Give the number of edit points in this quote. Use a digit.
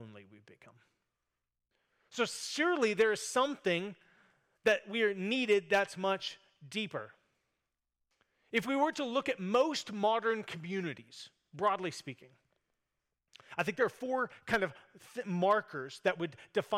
0